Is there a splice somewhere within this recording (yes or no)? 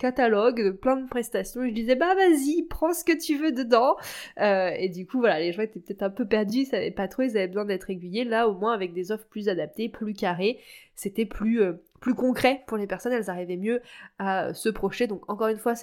no